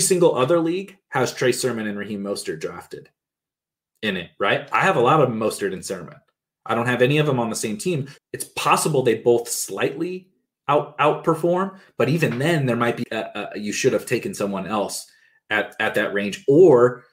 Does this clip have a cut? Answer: yes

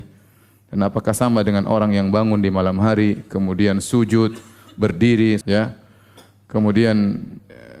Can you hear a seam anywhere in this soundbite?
yes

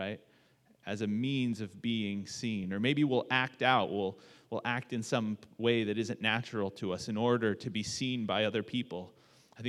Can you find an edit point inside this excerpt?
no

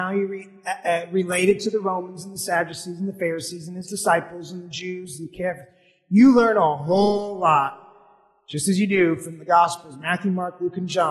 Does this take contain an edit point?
no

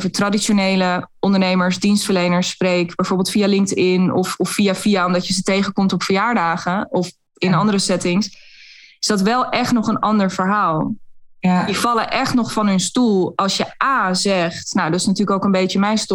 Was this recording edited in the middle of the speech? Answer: no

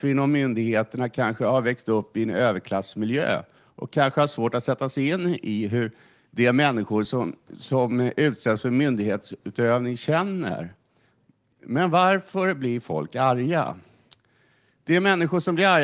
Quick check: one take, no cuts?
yes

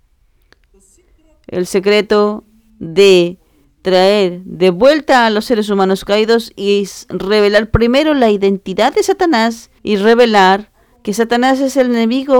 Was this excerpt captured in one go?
no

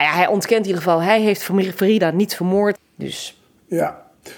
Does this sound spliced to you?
yes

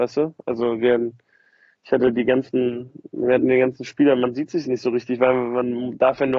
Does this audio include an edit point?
no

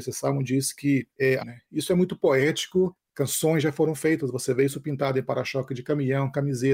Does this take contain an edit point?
yes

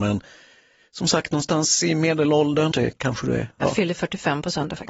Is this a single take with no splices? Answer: no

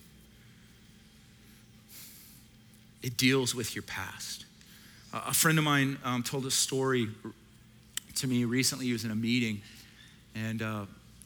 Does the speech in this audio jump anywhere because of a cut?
no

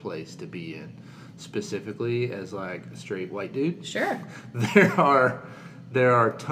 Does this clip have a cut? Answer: no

